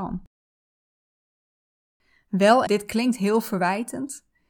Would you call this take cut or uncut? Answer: cut